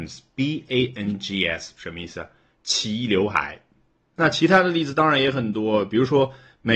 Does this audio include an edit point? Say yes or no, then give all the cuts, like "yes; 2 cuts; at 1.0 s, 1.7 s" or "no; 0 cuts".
no; 0 cuts